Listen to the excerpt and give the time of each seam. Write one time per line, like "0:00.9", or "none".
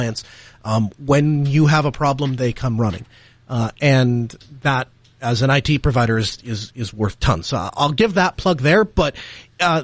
none